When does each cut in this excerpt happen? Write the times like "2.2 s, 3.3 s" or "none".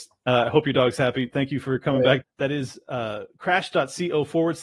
2.2 s